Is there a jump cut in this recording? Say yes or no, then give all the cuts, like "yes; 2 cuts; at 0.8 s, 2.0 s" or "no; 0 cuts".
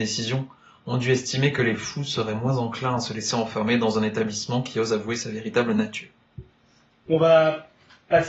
yes; 1 cut; at 7.1 s